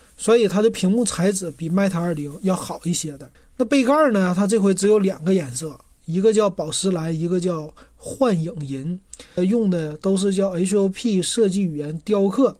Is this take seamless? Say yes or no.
no